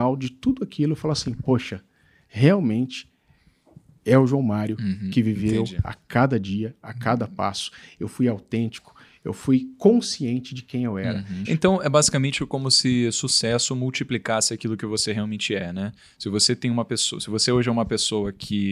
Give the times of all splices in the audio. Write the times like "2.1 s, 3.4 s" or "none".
11.4 s